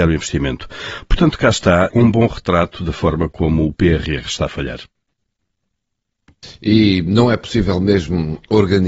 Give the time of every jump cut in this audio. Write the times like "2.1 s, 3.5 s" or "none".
1.9 s